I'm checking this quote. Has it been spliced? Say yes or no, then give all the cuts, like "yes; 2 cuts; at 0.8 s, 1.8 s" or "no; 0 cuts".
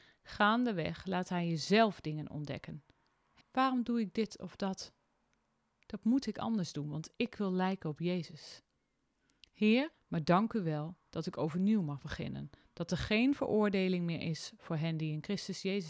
yes; 2 cuts; at 3.4 s, 9.9 s